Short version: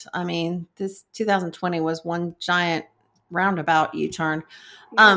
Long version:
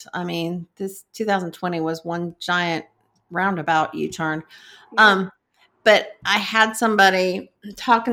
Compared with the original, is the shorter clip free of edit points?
yes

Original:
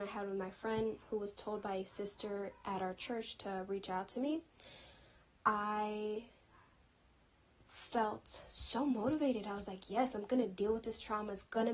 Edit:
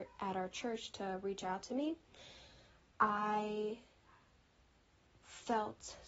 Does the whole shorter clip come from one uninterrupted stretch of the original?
yes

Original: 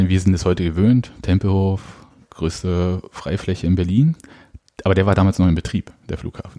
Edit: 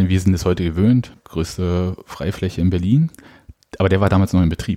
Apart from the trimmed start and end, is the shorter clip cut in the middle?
yes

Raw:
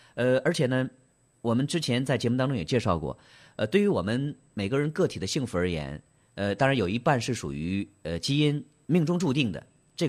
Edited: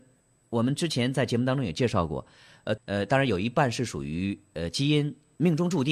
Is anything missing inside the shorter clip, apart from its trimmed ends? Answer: yes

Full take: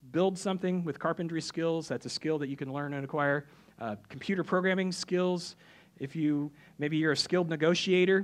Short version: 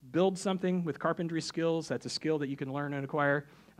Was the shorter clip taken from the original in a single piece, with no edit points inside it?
yes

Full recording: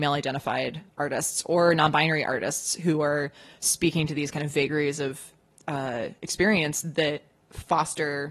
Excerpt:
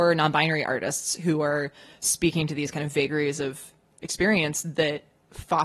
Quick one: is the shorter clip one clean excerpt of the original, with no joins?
no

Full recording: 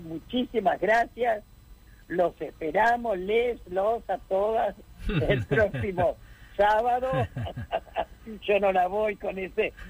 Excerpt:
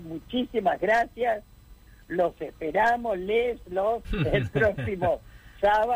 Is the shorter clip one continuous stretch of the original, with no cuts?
no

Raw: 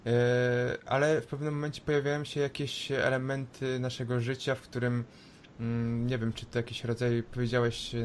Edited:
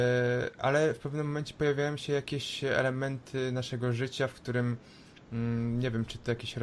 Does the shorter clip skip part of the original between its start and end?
no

